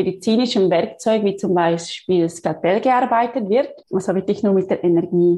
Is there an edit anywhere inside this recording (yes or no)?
yes